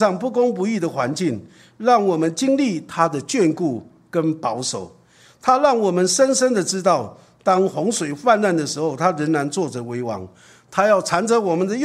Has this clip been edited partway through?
no; 0 cuts

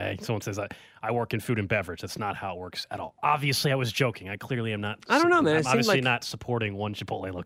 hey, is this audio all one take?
yes; 0 cuts

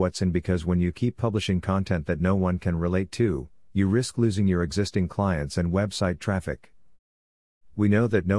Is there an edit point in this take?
no; 0 cuts

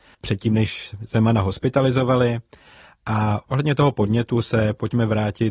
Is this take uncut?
yes; 0 cuts

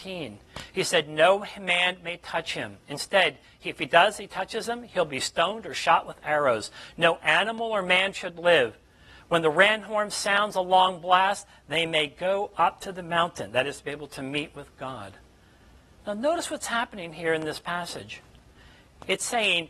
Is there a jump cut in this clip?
no; 0 cuts

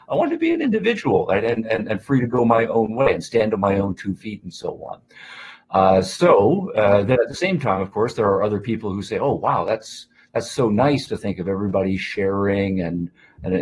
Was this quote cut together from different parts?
no; 0 cuts

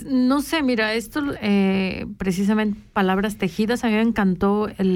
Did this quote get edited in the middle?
yes; 1 cut; at 1.3 s

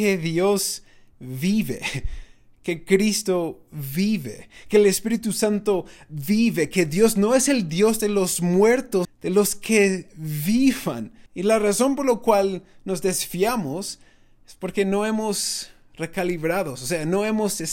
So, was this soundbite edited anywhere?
yes; 2 cuts; at 9.0 s, 11.3 s

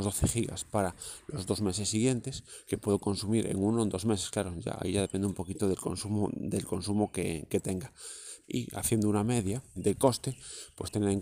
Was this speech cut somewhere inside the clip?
yes; 2 cuts; at 8.4 s, 9.8 s

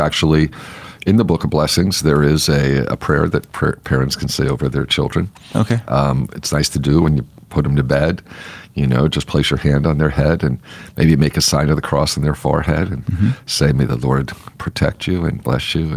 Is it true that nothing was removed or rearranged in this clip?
yes; 0 cuts

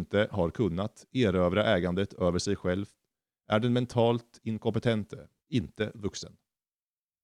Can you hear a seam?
yes; 1 cut; at 5.4 s

